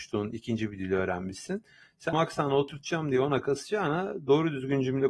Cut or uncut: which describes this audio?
cut